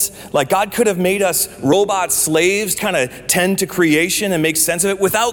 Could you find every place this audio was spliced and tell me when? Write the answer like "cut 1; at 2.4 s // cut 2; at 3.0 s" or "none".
cut 1; at 2.8 s